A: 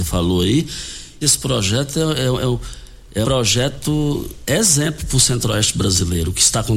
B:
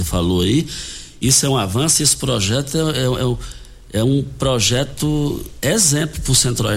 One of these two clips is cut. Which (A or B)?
A